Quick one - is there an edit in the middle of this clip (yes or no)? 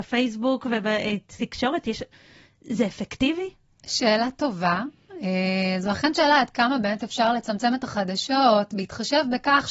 no